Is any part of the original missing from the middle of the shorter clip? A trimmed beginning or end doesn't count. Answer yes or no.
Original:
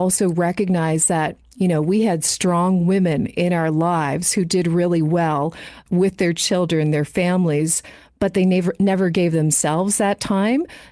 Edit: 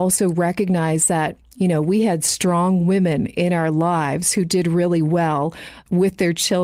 no